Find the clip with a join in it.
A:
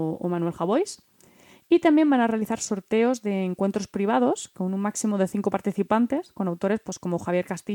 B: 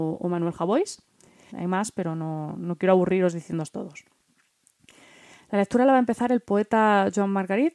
B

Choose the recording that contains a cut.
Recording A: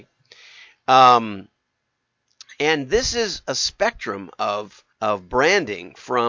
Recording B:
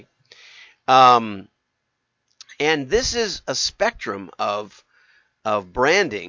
A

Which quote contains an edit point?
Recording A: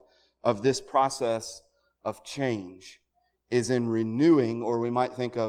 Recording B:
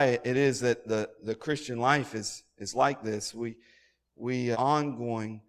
B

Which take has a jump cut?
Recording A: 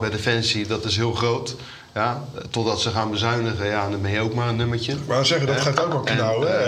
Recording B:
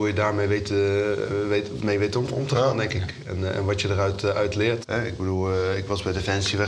B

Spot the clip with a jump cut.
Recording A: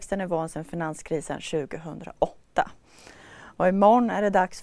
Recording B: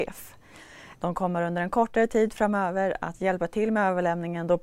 B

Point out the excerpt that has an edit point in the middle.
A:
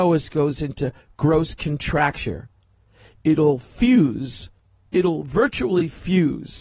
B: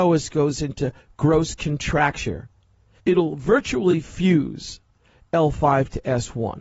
B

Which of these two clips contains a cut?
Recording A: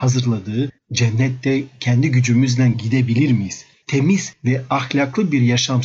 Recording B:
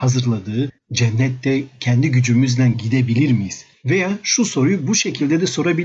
A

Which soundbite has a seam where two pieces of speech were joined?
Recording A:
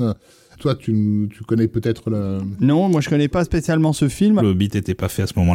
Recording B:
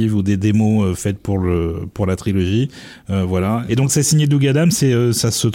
A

